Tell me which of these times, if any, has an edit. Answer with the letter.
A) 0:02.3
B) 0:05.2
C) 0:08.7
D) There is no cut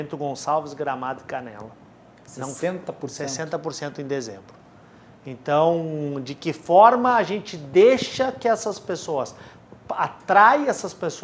D